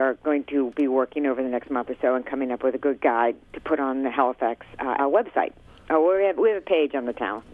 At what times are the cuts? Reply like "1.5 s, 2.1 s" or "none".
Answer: 5.0 s